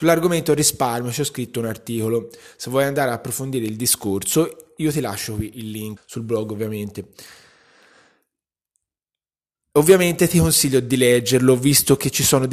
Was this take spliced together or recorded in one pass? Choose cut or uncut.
cut